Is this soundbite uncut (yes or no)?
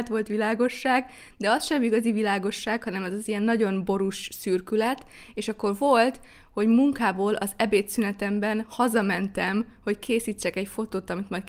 yes